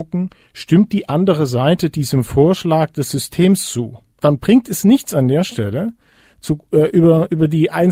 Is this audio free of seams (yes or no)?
no